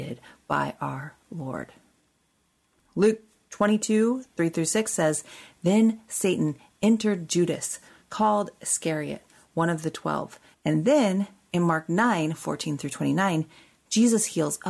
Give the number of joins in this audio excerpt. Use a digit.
2